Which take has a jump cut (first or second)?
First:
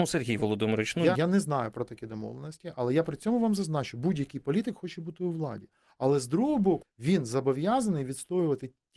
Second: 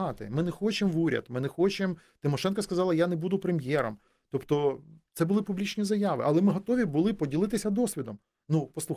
first